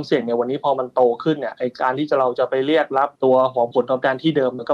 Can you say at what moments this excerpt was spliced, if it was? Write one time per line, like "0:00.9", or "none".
0:03.1